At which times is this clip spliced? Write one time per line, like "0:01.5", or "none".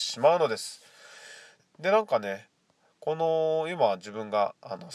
0:01.6